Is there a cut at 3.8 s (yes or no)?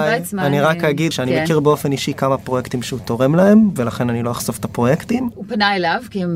yes